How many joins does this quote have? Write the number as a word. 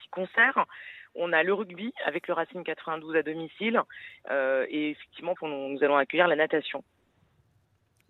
two